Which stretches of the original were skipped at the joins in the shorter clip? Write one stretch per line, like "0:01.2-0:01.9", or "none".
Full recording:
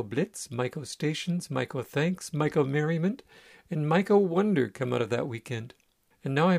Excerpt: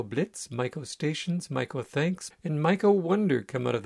0:02.3-0:03.6